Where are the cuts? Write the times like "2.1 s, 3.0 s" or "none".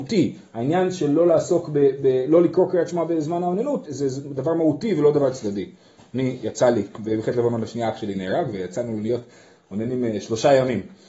3.9 s